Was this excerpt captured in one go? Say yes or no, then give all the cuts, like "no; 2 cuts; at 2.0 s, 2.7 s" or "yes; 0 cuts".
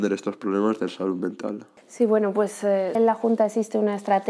no; 1 cut; at 2.9 s